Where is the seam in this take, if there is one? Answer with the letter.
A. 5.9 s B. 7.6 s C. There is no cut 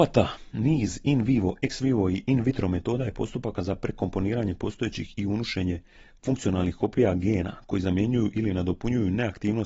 C